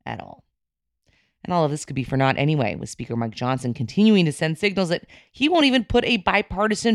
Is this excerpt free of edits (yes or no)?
yes